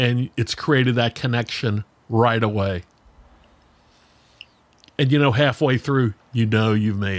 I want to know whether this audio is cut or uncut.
cut